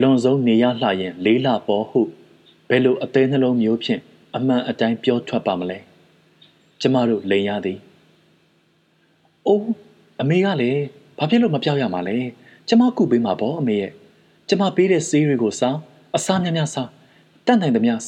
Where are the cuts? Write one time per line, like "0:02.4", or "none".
none

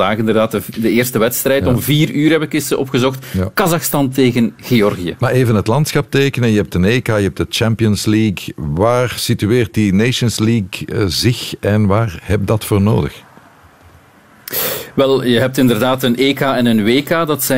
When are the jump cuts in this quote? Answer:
0:07.0

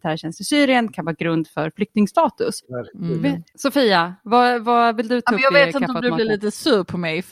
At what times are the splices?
0:02.6

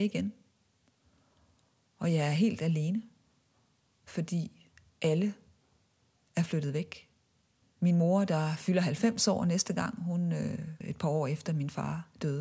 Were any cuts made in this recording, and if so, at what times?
0:07.6
0:10.8

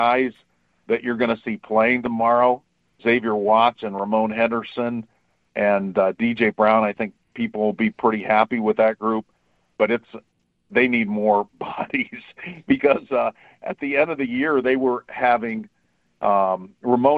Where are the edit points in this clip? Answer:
0:03.0

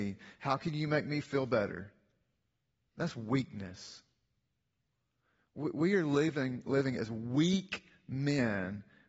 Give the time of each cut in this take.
0:02.9

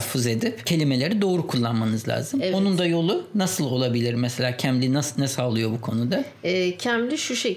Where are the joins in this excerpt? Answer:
none

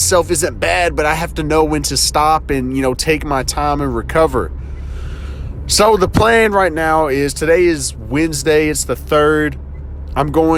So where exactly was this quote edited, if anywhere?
none

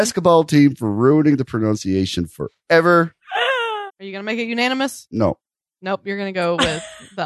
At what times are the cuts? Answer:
0:03.9

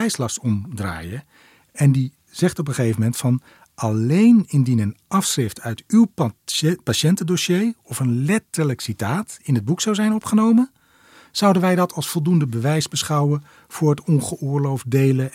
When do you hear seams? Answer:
none

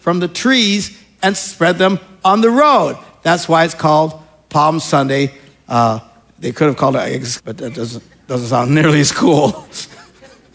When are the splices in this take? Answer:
0:07.4

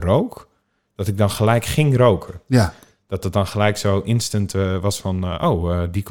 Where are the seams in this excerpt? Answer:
none

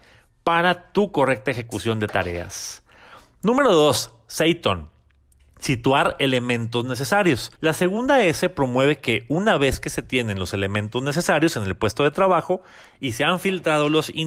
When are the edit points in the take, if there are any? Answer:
0:07.6

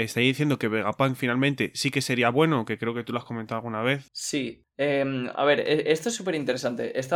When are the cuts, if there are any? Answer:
none

